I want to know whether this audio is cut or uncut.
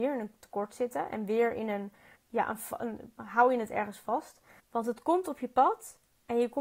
cut